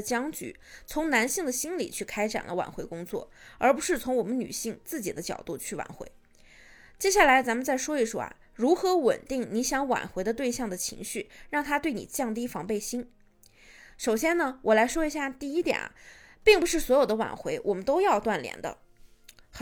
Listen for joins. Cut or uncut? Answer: uncut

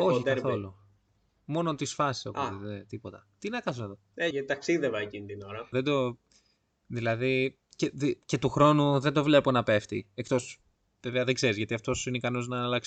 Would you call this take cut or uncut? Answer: cut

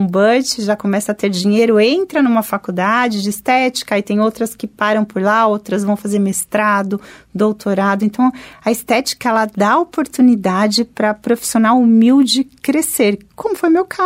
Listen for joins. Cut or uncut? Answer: uncut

